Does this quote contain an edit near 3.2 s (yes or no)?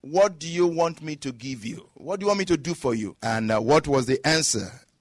yes